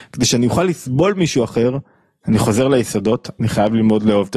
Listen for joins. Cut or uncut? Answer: uncut